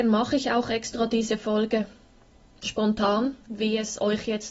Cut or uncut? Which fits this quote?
cut